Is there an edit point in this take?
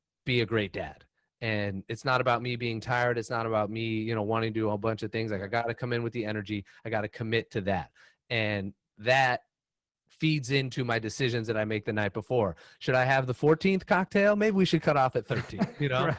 no; 0 cuts

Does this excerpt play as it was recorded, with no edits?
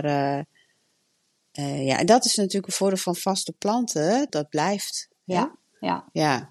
no; 1 cut; at 4.3 s

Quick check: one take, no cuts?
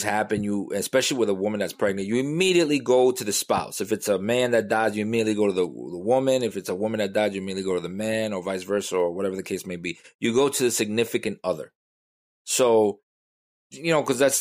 yes; 0 cuts

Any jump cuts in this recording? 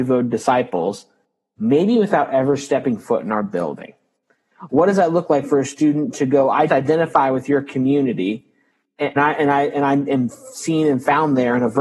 yes; 3 cuts; at 4.7 s, 6.7 s, 9.2 s

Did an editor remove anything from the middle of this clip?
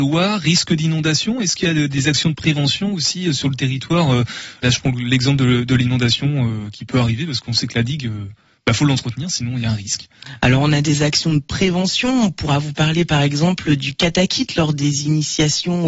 yes; 1 cut; at 4.6 s

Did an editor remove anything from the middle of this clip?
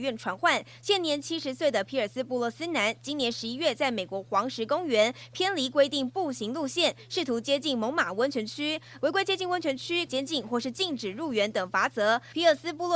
yes; 2 cuts; at 9.0 s, 10.1 s

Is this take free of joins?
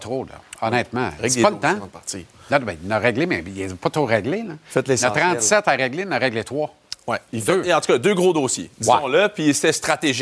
yes; 0 cuts

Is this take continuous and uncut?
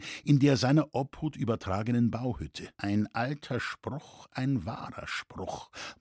no; 1 cut; at 2.7 s

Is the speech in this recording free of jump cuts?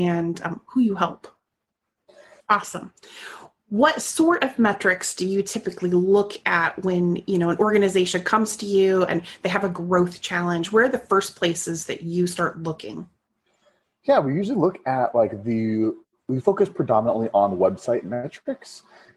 no; 1 cut; at 2.4 s

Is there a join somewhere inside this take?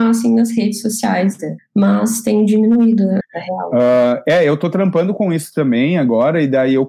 yes; 2 cuts; at 1.6 s, 3.2 s

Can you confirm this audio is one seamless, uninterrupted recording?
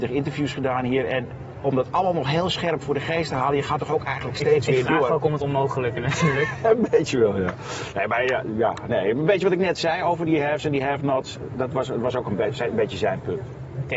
yes; 0 cuts

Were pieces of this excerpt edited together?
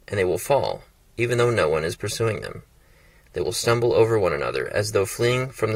no; 0 cuts

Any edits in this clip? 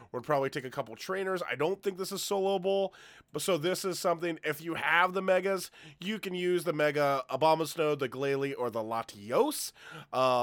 no; 0 cuts

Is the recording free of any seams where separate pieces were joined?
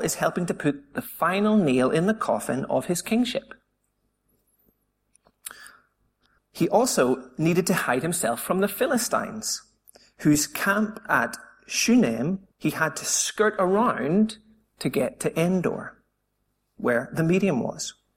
no; 2 cuts; at 6.4 s, 12.5 s

